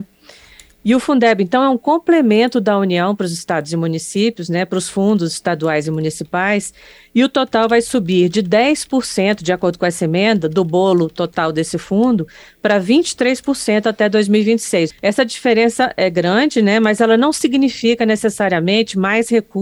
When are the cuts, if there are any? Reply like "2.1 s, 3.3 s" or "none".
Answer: 14.9 s